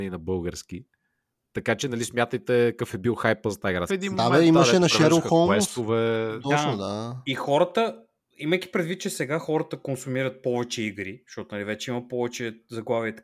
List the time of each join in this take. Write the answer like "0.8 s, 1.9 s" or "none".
3.9 s